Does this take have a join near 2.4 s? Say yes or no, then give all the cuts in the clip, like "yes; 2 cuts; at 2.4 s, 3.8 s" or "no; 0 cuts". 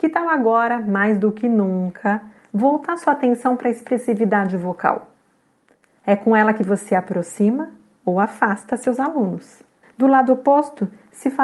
yes; 2 cuts; at 2.4 s, 9.8 s